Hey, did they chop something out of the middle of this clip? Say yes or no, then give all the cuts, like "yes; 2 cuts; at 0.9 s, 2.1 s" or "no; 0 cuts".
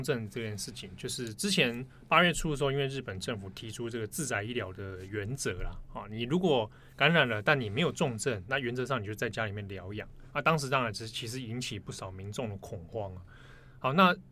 no; 0 cuts